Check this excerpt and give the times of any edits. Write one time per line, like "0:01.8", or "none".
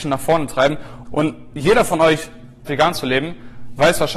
0:01.0
0:02.7